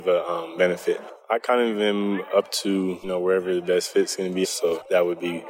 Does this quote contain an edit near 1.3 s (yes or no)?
no